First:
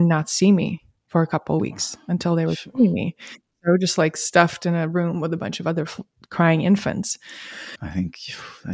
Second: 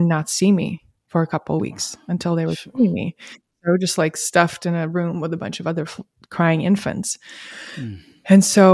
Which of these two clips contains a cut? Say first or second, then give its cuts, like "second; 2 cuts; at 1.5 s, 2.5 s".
first; 1 cut; at 7.8 s